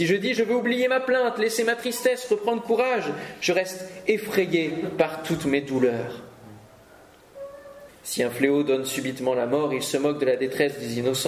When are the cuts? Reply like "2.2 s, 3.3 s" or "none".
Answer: 7.9 s